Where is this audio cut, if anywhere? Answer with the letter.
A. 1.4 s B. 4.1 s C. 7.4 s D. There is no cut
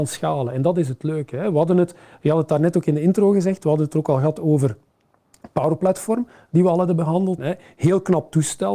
C